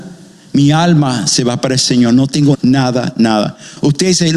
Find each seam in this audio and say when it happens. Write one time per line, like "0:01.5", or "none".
0:02.5